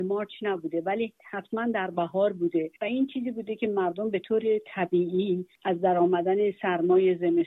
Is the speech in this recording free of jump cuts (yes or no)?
no